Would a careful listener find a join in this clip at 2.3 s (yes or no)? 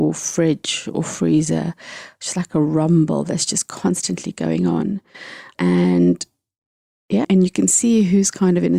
no